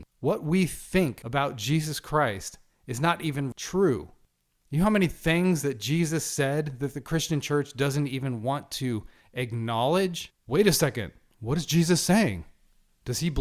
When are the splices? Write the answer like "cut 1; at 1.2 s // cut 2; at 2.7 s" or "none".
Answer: cut 1; at 10.4 s